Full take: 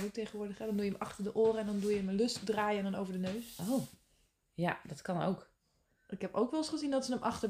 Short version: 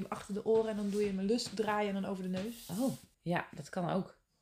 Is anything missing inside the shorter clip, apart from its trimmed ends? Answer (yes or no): yes